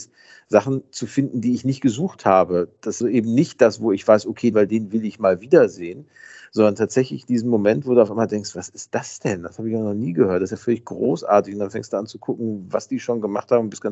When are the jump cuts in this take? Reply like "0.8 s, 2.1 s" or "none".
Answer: 3.0 s, 4.5 s